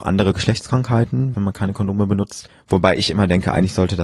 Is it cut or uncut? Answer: cut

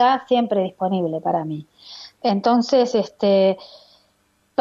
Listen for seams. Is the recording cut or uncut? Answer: cut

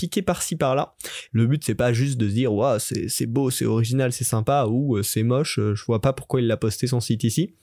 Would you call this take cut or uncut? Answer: cut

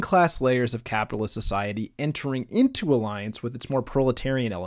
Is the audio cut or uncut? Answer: uncut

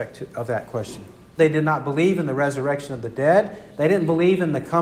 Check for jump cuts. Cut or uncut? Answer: cut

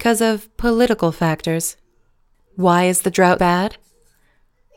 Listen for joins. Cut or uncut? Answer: cut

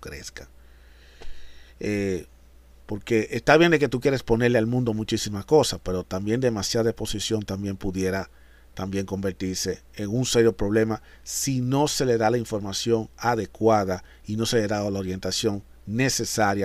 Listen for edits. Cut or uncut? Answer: uncut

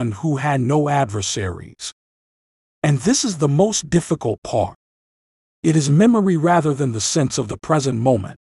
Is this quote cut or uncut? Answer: uncut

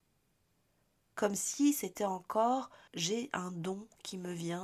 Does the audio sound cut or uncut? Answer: cut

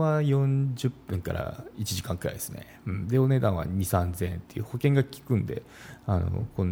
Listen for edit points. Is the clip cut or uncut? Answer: uncut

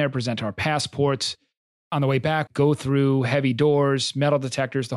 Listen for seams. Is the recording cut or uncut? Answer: cut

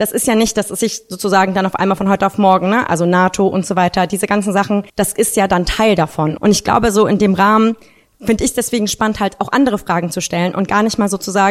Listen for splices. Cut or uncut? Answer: cut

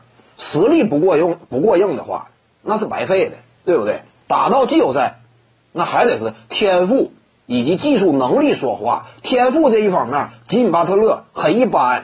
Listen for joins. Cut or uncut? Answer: uncut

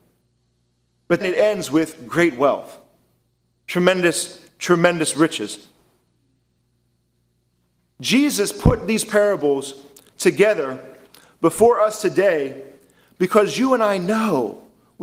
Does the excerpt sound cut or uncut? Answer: cut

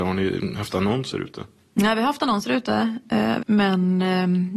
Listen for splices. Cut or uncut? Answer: cut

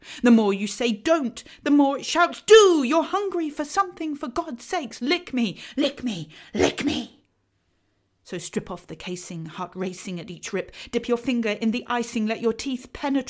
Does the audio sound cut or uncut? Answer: uncut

